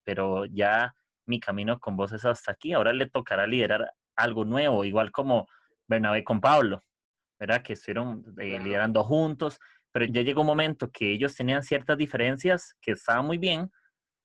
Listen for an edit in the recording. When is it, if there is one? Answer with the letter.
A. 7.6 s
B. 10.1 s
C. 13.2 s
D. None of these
B